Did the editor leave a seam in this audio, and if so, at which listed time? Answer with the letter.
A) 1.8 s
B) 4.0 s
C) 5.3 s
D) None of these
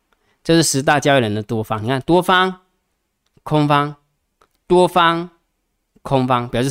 D